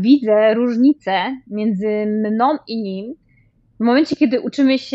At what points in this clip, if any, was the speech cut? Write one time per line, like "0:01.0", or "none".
none